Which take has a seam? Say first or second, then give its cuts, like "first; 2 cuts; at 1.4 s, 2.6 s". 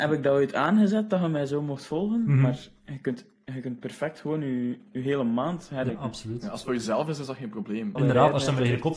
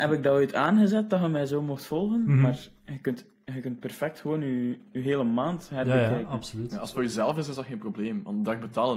first; 2 cuts; at 5.9 s, 8.0 s